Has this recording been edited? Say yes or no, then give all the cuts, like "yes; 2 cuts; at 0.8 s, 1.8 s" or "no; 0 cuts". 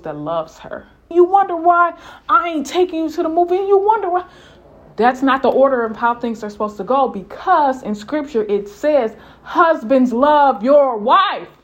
yes; 1 cut; at 1.1 s